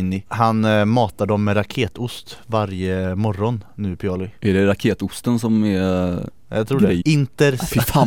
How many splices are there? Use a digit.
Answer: 2